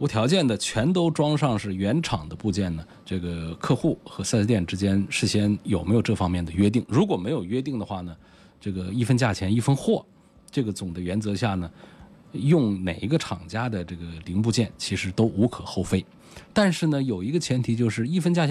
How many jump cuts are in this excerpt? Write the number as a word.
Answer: one